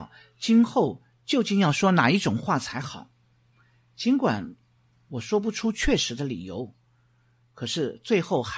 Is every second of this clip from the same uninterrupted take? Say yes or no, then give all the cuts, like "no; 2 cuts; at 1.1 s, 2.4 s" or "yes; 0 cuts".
yes; 0 cuts